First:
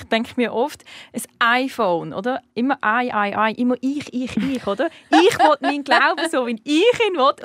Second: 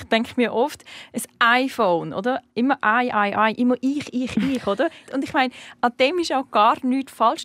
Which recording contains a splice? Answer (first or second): second